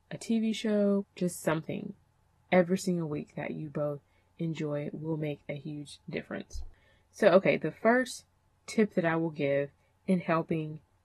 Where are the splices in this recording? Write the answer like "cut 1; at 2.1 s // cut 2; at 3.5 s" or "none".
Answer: cut 1; at 1.0 s